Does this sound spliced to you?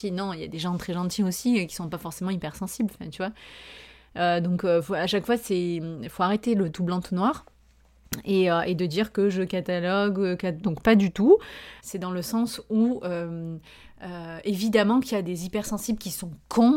yes; 2 cuts; at 10.6 s, 11.8 s

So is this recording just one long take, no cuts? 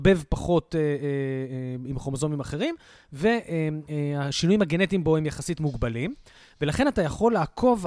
yes; 0 cuts

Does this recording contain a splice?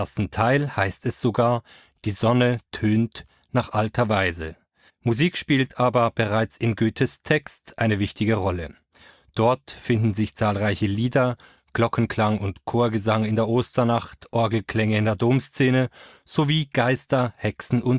yes; 1 cut; at 4.9 s

